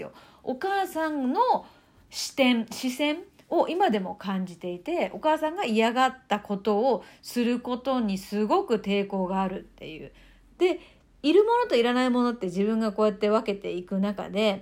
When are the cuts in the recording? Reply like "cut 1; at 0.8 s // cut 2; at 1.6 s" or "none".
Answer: cut 1; at 10.5 s